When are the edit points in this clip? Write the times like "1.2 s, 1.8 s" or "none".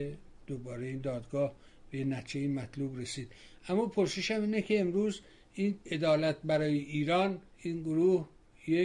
5.8 s, 7.5 s